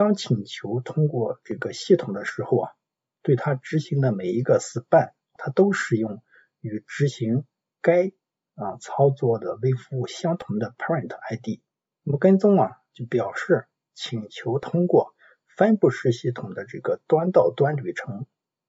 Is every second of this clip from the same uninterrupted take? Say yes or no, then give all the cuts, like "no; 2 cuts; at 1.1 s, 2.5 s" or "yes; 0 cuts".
no; 2 cuts; at 5.4 s, 11.9 s